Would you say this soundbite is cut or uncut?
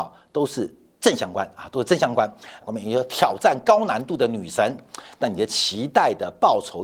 cut